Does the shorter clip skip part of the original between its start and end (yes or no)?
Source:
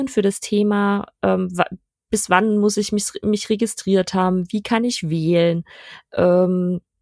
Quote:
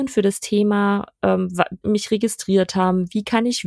yes